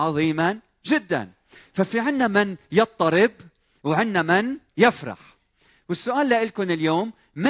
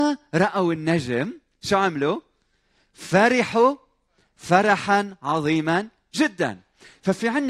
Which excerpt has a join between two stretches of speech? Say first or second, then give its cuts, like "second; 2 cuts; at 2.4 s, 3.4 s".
first; 1 cut; at 4.7 s